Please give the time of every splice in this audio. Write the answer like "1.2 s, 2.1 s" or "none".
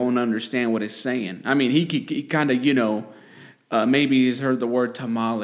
none

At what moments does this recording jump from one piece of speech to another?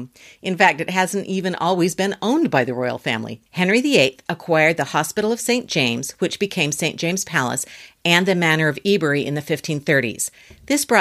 3.5 s

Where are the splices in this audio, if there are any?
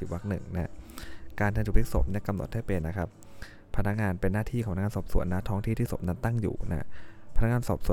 2.8 s

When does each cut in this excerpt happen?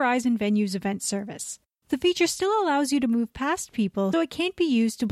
1.8 s, 4.1 s

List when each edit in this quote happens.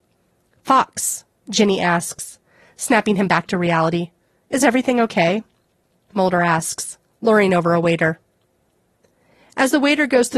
6.1 s

